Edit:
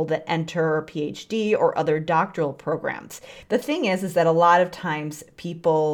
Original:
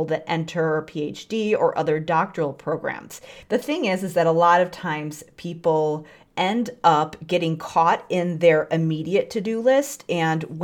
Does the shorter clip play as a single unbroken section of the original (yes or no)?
yes